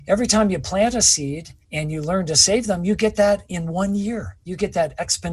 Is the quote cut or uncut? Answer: cut